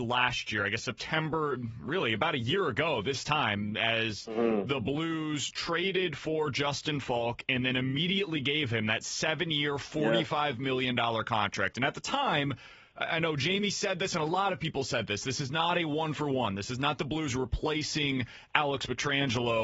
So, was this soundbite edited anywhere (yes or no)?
no